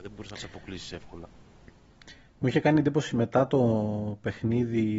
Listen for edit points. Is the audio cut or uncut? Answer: uncut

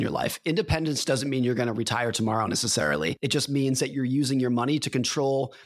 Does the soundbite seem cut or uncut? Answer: uncut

